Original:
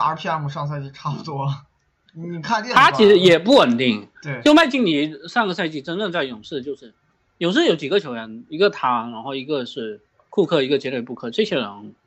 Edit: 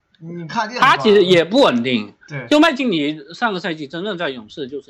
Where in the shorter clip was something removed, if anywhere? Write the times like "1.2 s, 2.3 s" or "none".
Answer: none